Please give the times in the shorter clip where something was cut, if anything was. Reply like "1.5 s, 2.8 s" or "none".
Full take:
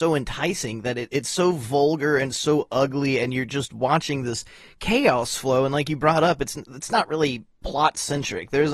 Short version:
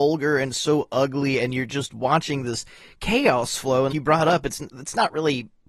3.9 s